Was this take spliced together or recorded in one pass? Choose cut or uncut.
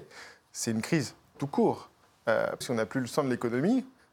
cut